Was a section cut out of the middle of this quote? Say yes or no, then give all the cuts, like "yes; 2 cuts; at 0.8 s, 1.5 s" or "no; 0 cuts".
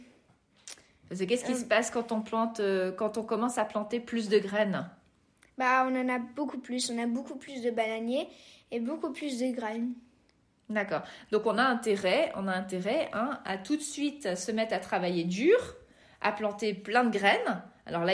no; 0 cuts